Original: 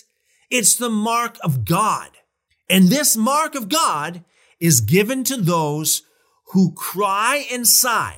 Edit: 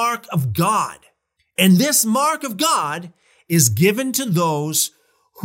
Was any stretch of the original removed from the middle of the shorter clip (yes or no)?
no